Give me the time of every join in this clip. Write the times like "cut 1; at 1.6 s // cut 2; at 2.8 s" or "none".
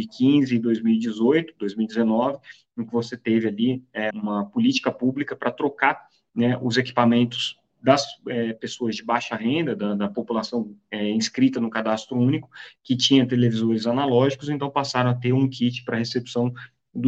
cut 1; at 4.1 s